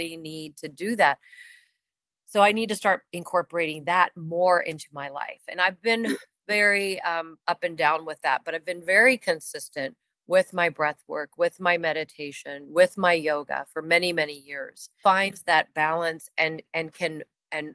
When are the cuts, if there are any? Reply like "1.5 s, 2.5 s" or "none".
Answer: 15.0 s